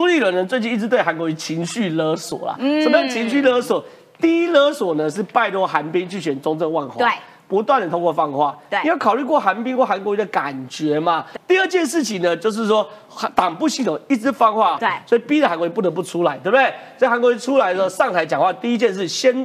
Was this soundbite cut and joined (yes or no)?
yes